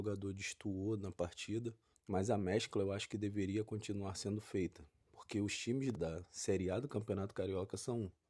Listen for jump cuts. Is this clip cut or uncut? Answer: cut